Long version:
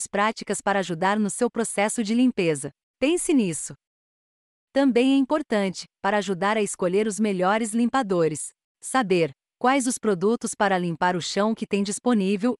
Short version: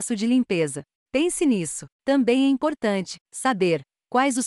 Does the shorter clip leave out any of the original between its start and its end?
yes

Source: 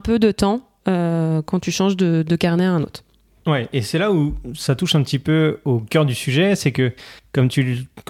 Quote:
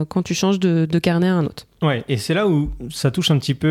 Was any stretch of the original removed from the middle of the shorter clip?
yes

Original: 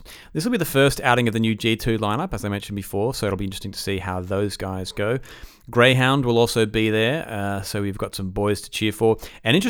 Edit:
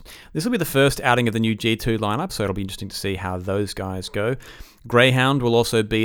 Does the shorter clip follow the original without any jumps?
no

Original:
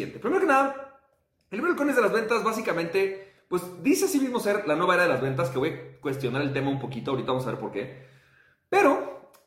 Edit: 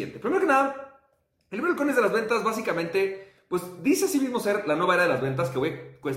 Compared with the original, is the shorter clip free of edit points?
yes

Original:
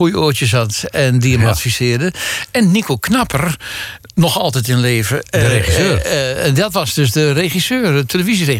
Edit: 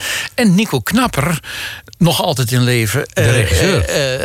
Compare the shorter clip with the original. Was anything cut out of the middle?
no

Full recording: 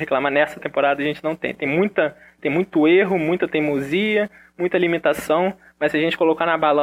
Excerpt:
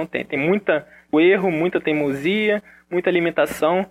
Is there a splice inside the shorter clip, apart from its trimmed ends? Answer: yes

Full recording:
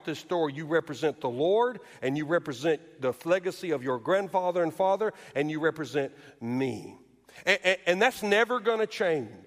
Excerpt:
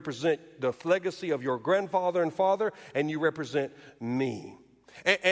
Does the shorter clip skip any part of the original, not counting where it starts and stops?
no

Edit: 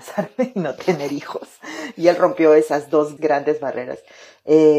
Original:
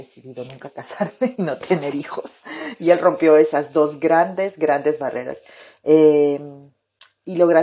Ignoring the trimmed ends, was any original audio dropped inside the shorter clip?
yes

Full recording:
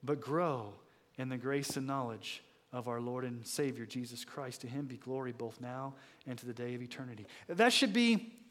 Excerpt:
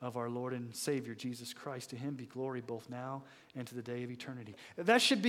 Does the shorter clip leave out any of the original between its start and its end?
no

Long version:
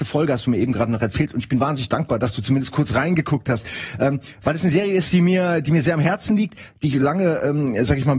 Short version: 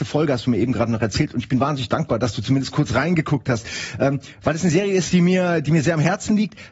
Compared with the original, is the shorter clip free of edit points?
yes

